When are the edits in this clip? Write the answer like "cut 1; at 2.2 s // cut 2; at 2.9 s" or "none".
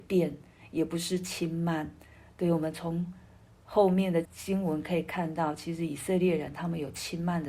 cut 1; at 4.3 s